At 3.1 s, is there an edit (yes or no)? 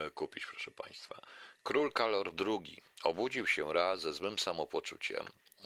no